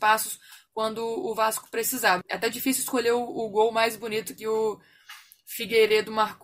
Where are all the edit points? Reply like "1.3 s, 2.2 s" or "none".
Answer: 2.2 s

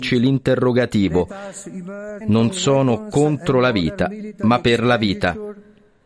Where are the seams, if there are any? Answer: 2.2 s

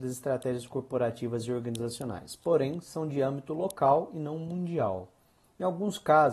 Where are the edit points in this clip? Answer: none

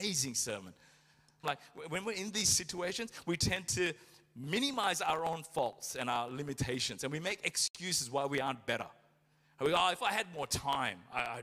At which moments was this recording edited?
1.4 s

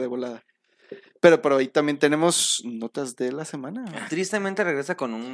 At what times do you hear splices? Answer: 4.1 s

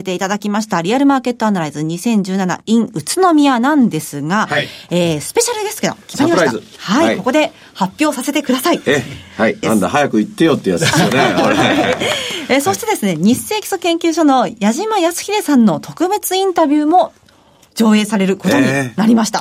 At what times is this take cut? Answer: 9.6 s

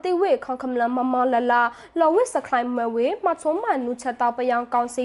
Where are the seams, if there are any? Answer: none

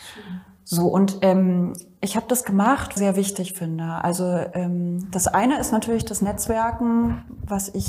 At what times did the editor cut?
3.0 s

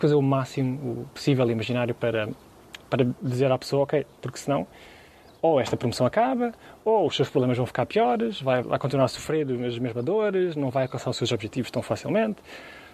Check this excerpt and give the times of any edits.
4.2 s, 8.6 s

